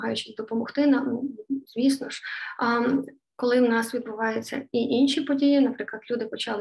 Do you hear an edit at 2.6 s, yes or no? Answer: yes